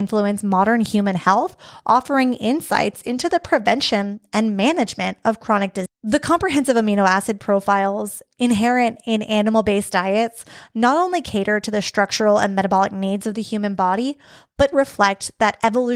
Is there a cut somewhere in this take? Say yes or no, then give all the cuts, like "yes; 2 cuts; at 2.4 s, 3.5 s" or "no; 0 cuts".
yes; 2 cuts; at 5.9 s, 14.7 s